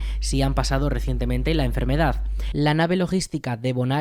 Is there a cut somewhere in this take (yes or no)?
yes